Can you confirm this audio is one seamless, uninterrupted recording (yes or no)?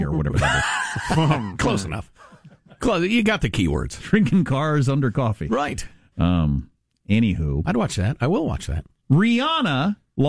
yes